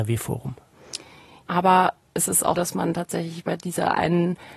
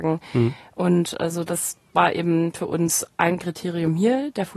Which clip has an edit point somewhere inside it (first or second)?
first